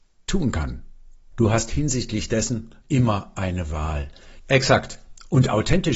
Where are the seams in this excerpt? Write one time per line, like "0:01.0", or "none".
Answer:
0:01.3
0:02.8
0:04.4